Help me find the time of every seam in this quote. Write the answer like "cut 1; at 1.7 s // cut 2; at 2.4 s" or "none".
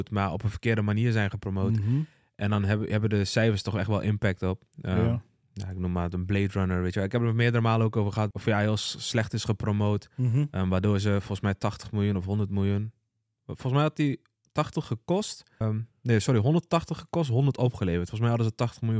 cut 1; at 8.3 s // cut 2; at 15.6 s